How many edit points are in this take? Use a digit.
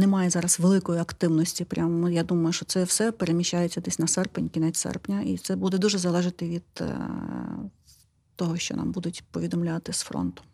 0